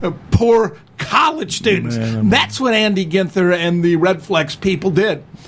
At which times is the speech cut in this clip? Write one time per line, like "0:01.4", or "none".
none